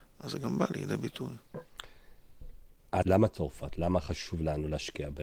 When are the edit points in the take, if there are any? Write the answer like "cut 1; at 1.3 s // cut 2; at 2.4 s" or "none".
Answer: cut 1; at 3.0 s